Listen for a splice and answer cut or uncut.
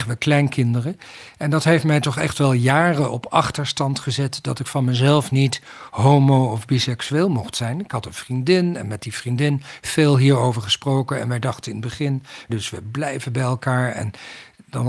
cut